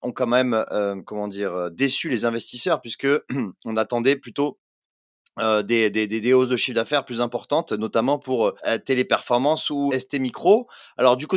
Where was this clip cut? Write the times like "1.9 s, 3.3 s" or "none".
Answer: 8.6 s, 9.9 s